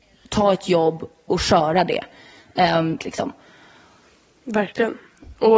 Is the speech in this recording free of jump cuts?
no; 2 cuts; at 1.3 s, 3.0 s

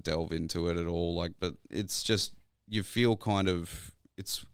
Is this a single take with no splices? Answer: no; 1 cut; at 1.4 s

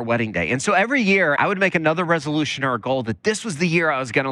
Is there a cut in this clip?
yes; 1 cut; at 1.4 s

